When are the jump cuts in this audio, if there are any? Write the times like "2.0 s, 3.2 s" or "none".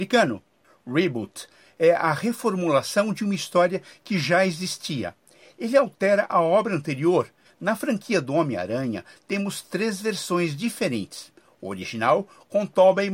7.5 s

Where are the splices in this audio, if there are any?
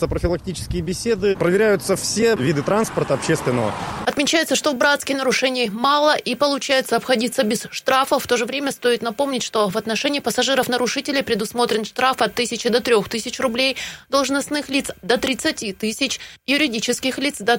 4.0 s

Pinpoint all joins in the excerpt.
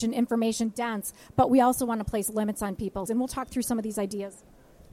3.1 s

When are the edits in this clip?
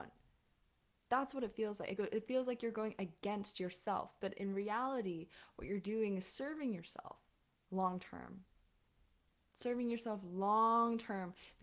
none

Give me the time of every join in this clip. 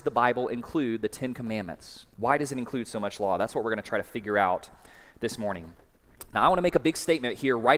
2.1 s

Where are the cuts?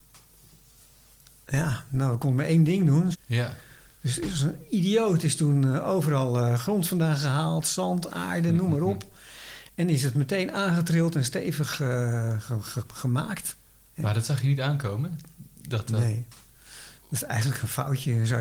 3.1 s

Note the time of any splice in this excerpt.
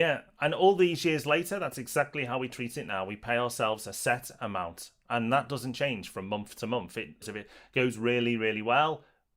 7.2 s

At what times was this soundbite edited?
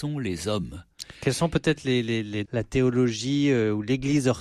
2.4 s

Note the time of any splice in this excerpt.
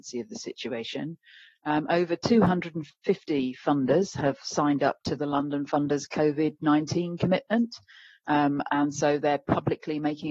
none

